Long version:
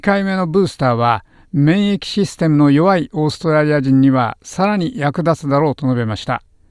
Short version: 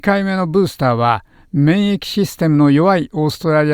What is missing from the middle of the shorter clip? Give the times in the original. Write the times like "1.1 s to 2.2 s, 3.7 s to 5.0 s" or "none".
none